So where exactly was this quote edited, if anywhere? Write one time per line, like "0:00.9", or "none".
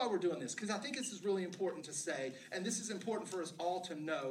none